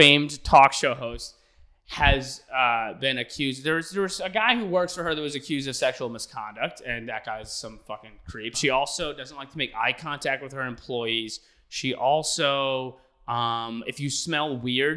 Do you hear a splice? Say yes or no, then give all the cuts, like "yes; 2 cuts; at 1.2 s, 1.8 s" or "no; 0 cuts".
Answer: yes; 1 cut; at 8.5 s